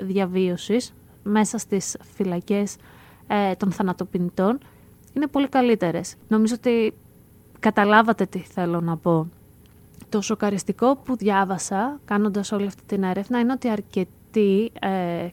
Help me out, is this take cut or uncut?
cut